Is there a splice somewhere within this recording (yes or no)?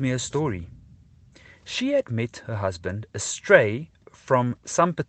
no